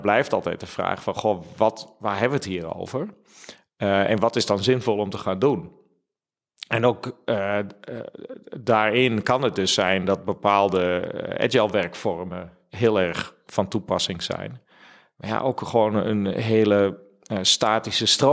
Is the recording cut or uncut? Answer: uncut